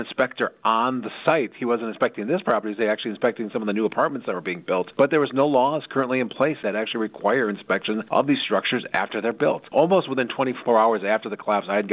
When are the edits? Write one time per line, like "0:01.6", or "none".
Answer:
none